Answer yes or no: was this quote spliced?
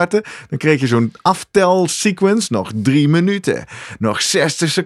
no